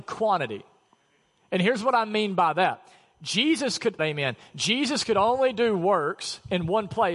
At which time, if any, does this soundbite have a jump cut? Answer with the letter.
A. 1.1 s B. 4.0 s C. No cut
B